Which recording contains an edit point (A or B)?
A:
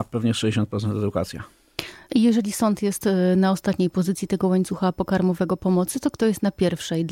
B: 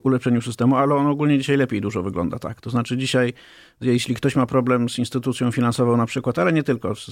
A